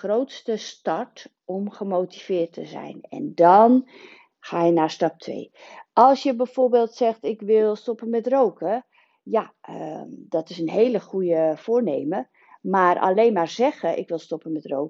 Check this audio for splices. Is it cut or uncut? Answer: uncut